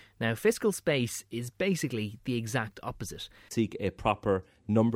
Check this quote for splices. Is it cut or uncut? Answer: cut